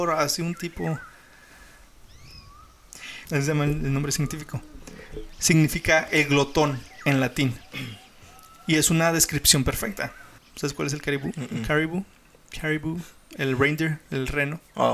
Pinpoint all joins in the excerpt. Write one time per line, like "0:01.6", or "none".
0:03.2
0:10.4